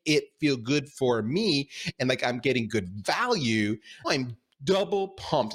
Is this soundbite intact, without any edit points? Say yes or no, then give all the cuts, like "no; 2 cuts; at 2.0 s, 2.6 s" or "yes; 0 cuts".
no; 1 cut; at 4.0 s